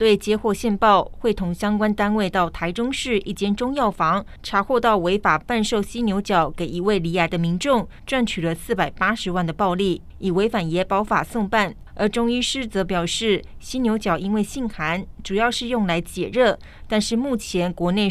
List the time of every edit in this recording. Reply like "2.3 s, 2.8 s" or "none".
none

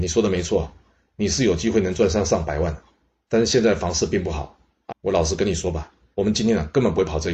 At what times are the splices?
4.9 s, 6.1 s

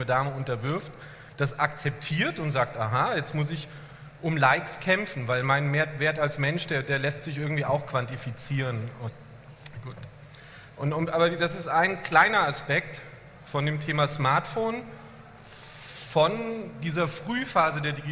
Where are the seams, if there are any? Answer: none

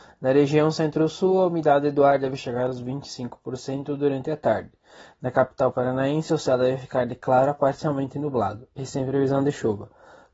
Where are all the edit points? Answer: none

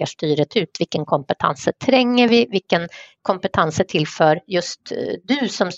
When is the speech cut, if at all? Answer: none

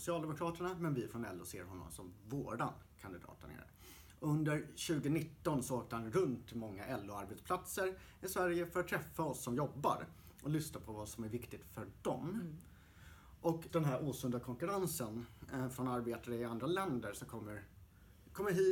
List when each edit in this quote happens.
13.7 s

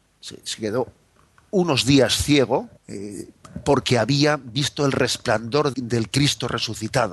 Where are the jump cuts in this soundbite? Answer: 2.8 s, 5.7 s

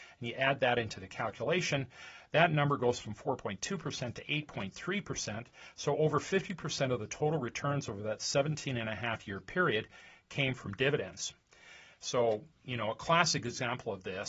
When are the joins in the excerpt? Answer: none

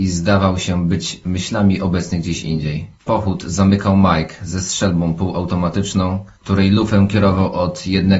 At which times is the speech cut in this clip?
3.0 s, 6.3 s

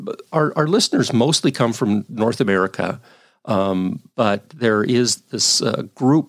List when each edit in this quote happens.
5.2 s

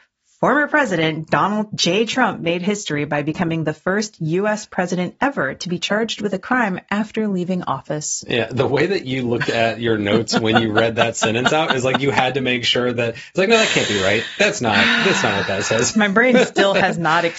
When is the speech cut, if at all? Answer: none

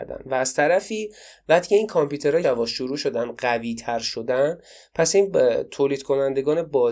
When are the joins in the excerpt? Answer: 2.4 s

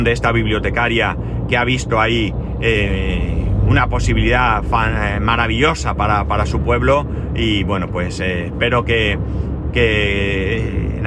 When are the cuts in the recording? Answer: none

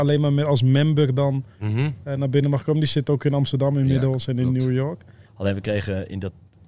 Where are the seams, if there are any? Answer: 5.3 s

